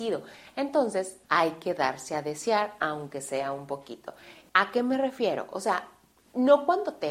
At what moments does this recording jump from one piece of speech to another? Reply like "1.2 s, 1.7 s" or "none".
1.2 s, 4.5 s